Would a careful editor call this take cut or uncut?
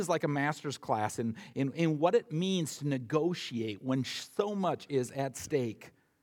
uncut